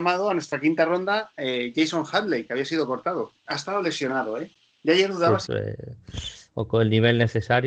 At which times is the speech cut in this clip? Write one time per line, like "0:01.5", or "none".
0:03.5
0:05.5